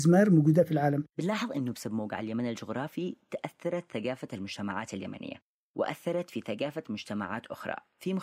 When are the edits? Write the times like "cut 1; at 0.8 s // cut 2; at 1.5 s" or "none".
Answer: cut 1; at 1.1 s

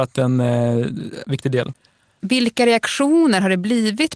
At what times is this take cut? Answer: cut 1; at 1.2 s

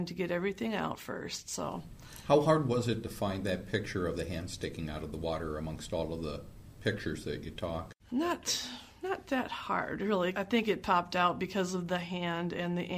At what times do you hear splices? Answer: cut 1; at 8.0 s // cut 2; at 10.3 s

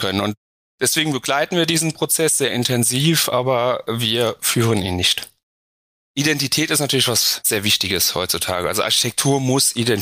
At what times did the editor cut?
cut 1; at 6.0 s

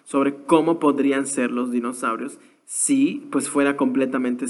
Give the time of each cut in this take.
none

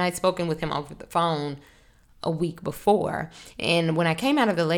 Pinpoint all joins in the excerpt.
none

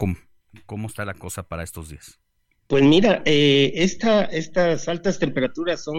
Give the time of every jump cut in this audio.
none

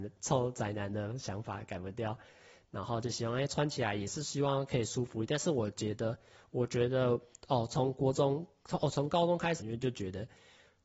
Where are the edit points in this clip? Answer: cut 1; at 9.6 s

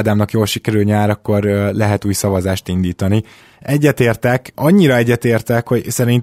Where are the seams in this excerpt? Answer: none

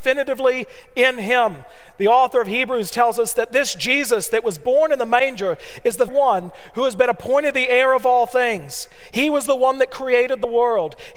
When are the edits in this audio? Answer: cut 1; at 6.1 s

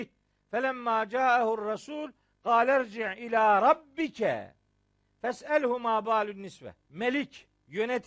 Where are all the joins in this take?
cut 1; at 6.8 s

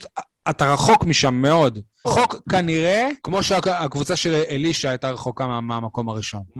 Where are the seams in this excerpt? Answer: cut 1; at 2.0 s // cut 2; at 3.2 s

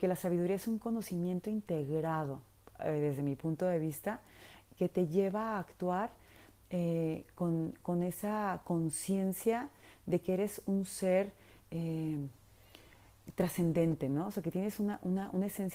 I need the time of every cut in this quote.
none

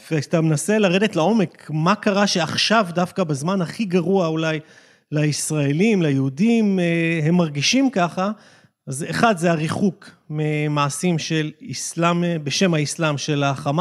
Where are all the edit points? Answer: none

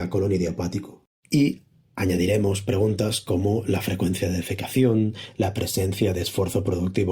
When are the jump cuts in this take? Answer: cut 1; at 1.1 s

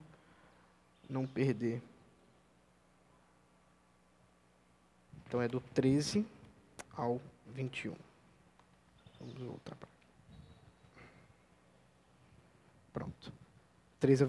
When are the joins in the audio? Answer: cut 1; at 9.0 s

